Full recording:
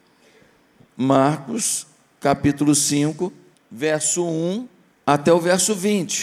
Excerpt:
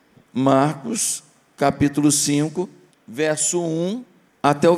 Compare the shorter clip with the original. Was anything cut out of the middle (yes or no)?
no